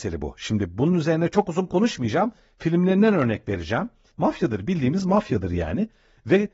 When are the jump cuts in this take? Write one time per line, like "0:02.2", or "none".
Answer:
0:04.1

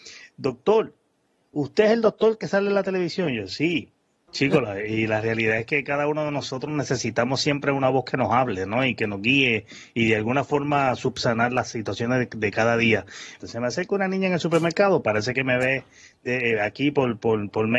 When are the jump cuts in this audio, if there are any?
0:04.3
0:13.4

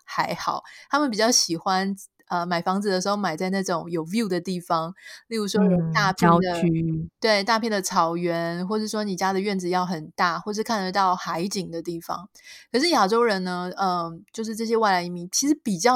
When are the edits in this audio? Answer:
none

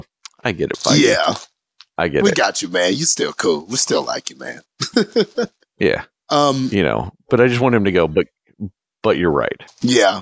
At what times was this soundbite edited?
none

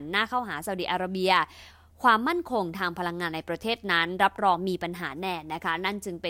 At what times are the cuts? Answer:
none

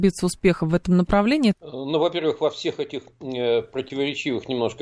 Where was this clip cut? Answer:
0:01.5

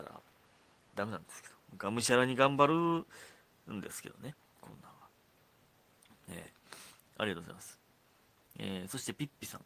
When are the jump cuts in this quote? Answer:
0:04.4

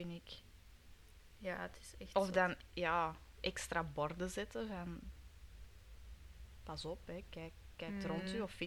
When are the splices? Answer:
none

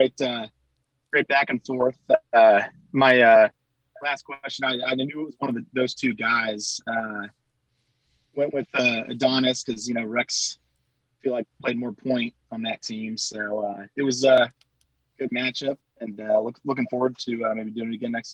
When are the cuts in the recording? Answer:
0:15.8

